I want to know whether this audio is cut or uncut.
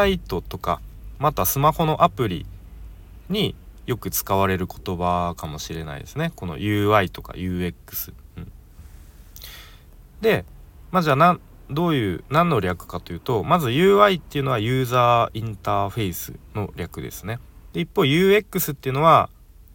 cut